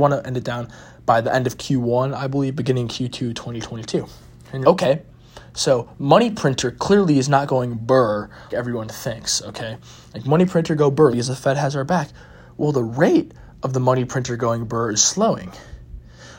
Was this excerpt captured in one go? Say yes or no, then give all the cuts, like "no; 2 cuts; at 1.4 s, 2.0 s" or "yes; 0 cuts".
no; 3 cuts; at 4.6 s, 8.5 s, 11.1 s